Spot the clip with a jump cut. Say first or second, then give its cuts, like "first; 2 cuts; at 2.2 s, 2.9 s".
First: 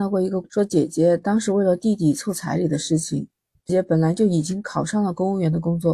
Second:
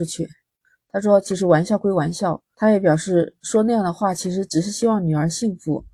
first; 1 cut; at 3.7 s